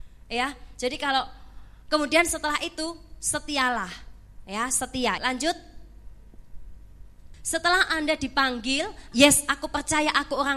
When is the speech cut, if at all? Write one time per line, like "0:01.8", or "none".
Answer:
0:05.2
0:07.3
0:09.1